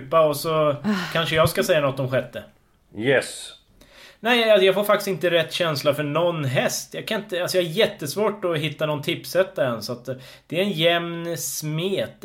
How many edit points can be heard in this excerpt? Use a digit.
0